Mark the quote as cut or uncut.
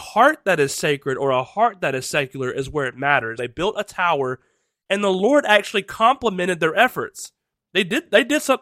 cut